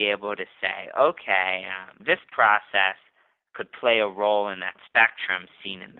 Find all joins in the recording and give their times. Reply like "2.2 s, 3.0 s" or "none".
2.0 s